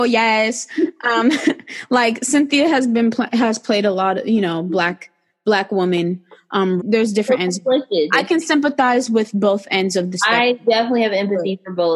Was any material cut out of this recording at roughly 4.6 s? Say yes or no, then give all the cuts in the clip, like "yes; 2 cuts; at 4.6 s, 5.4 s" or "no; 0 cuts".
no; 1 cut; at 6.8 s